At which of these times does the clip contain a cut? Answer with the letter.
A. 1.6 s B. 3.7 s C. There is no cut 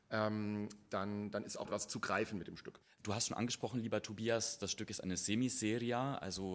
A